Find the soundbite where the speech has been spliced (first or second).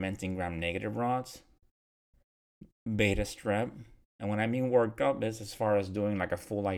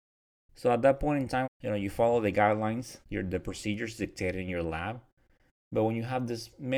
second